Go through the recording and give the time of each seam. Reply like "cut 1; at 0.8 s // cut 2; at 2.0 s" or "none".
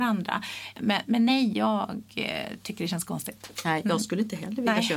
none